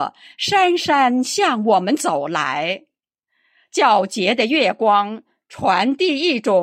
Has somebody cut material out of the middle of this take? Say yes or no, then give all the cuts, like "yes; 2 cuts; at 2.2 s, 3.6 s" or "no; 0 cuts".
no; 0 cuts